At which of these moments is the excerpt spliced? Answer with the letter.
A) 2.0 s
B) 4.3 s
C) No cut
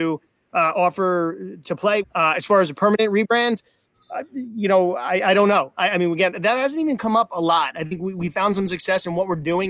A